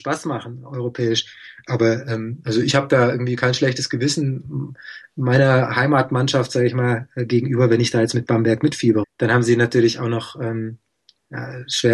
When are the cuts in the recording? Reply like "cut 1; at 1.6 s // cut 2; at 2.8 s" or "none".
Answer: cut 1; at 9.0 s